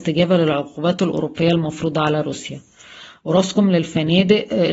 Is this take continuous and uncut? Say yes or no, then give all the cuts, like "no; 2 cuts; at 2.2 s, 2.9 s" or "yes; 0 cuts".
yes; 0 cuts